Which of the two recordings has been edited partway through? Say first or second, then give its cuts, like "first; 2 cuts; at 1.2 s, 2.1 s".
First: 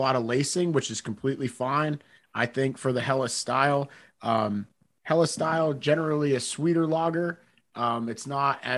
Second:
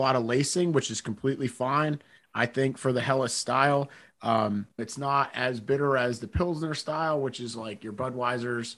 second; 1 cut; at 4.8 s